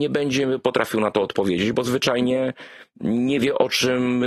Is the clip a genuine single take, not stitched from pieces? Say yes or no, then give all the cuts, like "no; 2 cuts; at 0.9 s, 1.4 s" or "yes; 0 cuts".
yes; 0 cuts